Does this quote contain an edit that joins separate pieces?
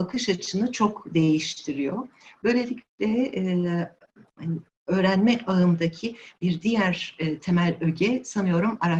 no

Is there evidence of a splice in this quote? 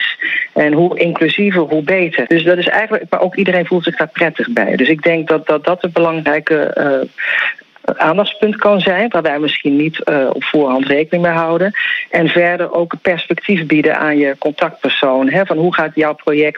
yes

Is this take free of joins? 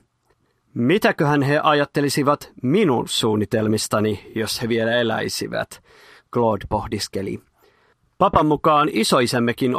yes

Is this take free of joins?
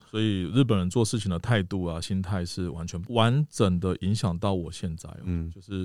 yes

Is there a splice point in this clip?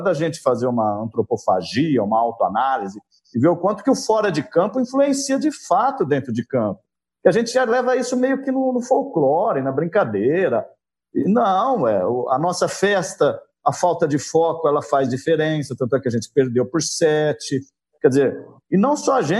no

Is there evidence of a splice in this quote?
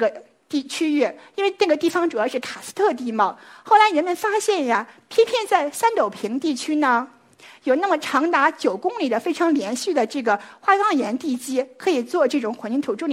no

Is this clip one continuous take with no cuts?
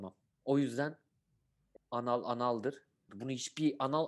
no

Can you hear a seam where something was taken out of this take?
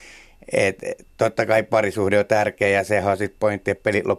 no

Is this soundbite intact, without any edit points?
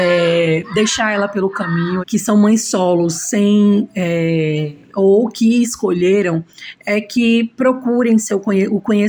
no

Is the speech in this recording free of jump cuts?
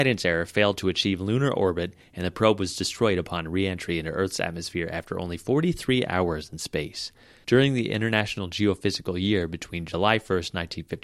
no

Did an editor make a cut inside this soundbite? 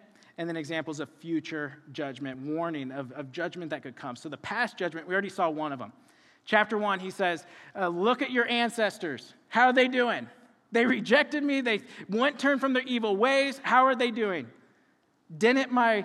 no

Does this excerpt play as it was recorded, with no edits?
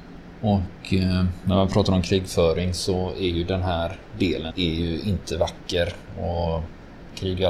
no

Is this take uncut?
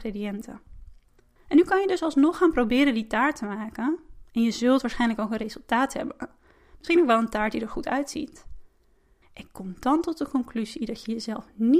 no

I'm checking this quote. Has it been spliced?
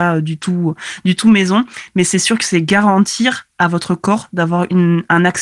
no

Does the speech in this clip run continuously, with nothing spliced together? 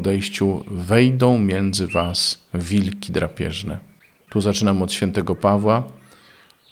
no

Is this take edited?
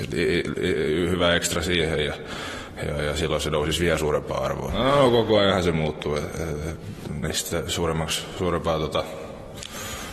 yes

